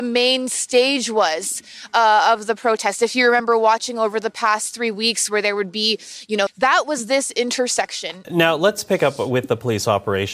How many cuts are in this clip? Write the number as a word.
two